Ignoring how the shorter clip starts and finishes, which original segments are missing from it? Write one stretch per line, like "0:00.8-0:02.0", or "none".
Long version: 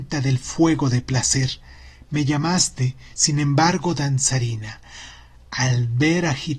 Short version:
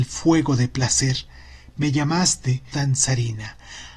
0:03.1-0:04.0